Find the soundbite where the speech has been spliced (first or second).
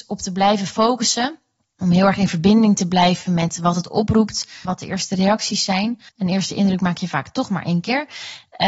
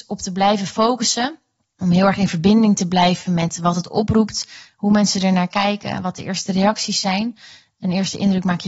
first